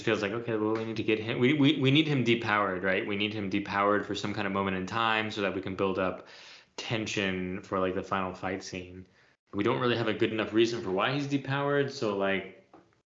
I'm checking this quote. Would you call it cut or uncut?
uncut